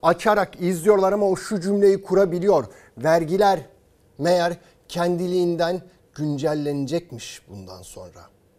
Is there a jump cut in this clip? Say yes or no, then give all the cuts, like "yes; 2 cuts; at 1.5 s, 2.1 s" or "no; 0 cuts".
no; 0 cuts